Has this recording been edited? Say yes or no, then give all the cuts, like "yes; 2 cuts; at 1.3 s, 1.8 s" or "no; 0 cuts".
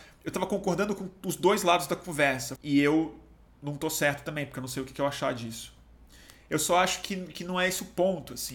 yes; 1 cut; at 2.6 s